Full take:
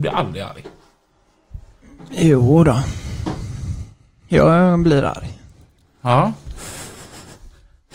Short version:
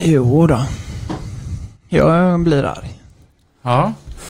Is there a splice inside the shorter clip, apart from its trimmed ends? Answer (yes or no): yes